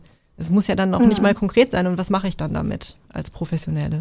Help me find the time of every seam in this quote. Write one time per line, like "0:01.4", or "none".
none